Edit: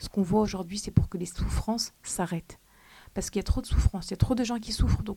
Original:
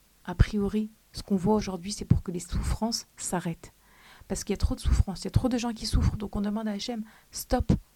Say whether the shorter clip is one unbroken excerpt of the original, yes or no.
yes